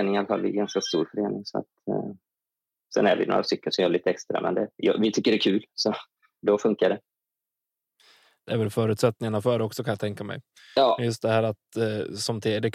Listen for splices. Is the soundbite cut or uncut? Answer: uncut